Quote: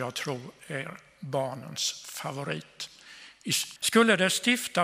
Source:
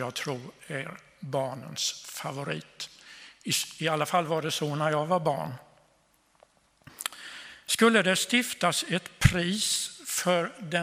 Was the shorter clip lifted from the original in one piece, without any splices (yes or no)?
no